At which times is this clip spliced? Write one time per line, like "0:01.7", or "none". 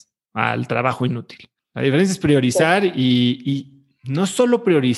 none